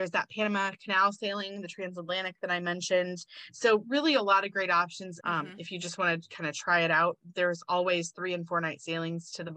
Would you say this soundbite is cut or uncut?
cut